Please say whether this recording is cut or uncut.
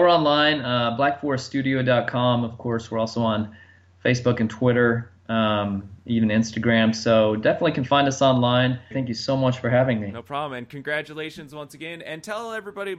cut